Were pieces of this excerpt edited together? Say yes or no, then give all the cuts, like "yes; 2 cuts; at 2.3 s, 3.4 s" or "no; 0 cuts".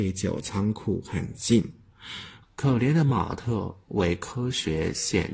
yes; 1 cut; at 2.4 s